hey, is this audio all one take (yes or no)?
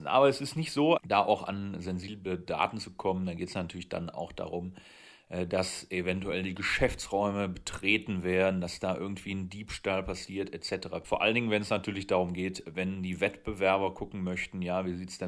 no